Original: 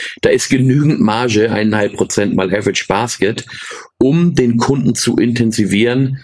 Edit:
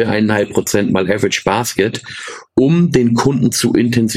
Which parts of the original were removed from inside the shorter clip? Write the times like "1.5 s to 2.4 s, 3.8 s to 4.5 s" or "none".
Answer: none

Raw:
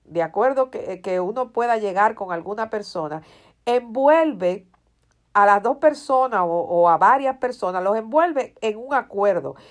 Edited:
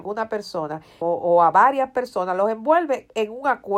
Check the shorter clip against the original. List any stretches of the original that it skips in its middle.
3.4 s to 6.5 s

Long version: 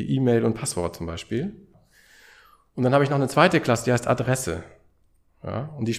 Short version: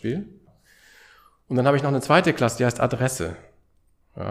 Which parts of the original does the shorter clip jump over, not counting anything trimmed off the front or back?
none

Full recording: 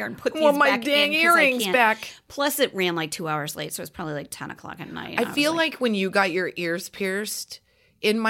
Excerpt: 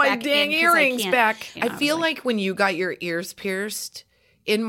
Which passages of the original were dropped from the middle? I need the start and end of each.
2.2 s to 5.1 s

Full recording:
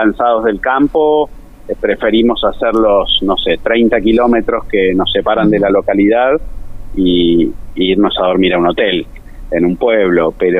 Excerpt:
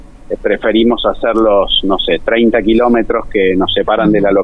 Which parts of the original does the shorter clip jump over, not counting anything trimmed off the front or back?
none

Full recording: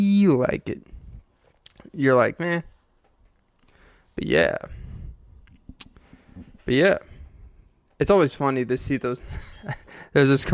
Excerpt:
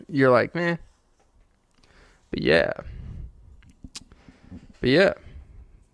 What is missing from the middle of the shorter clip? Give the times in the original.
none

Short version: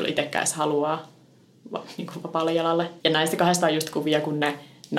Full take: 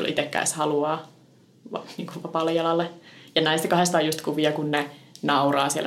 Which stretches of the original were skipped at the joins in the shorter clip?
3.0 s to 3.3 s

